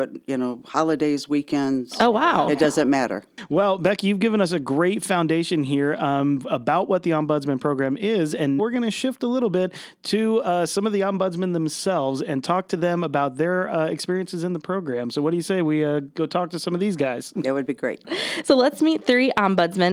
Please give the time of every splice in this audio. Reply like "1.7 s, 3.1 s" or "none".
8.6 s